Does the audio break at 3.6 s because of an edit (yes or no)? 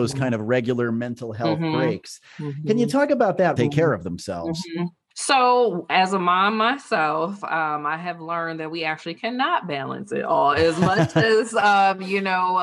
yes